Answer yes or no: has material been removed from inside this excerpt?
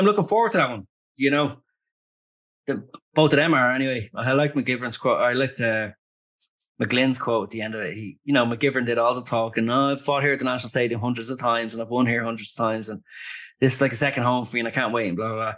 no